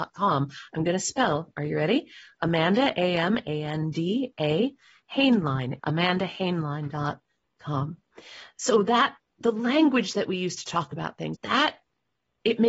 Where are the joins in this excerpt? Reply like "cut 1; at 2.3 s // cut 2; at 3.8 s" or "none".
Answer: cut 1; at 5.8 s // cut 2; at 11.3 s

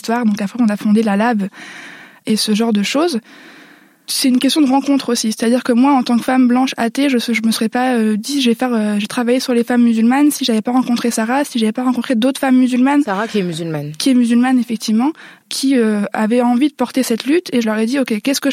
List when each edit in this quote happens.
none

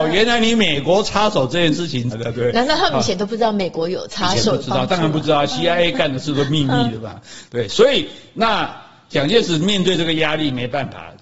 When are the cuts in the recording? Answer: cut 1; at 2.1 s

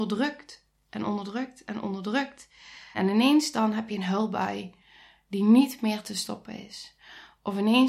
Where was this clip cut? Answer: cut 1; at 2.9 s

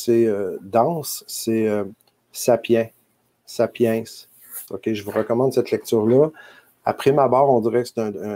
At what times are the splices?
cut 1; at 4.7 s

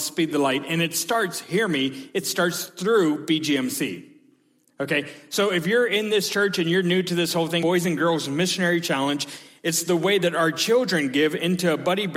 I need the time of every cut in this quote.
cut 1; at 7.6 s

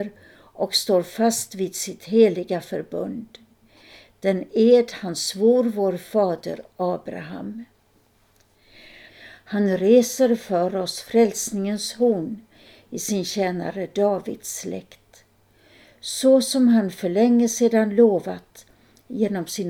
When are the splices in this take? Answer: cut 1; at 9.1 s

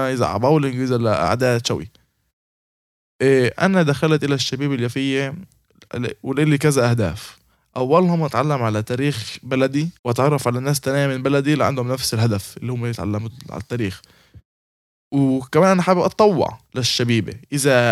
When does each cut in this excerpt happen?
cut 1; at 10.0 s // cut 2; at 16.6 s

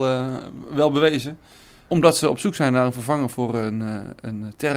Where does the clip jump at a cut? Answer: cut 1; at 1.9 s

